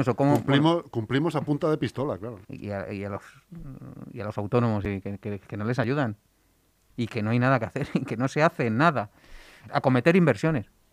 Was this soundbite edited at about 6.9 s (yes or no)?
yes